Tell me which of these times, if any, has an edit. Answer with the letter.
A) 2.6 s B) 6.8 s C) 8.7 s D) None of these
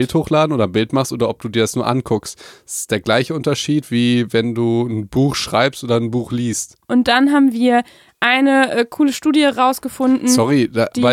B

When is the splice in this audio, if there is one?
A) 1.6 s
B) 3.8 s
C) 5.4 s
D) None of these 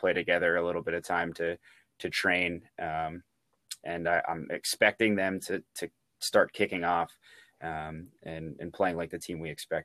B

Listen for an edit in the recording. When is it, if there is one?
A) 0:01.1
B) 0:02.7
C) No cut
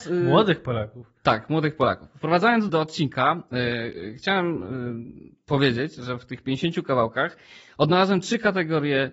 B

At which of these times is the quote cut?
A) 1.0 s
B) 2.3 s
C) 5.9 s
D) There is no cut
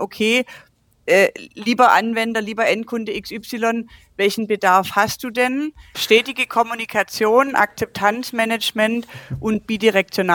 C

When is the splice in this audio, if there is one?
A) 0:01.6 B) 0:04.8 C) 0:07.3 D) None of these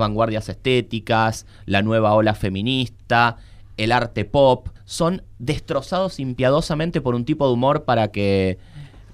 B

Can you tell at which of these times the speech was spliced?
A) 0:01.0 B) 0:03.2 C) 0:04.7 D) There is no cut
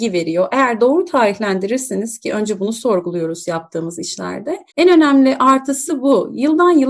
C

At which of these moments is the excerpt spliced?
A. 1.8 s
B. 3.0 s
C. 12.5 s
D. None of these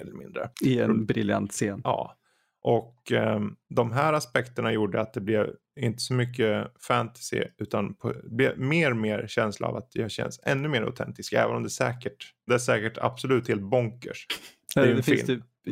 C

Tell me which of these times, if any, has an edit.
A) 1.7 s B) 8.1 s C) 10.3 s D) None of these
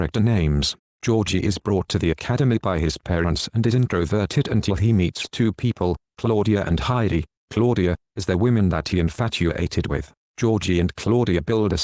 B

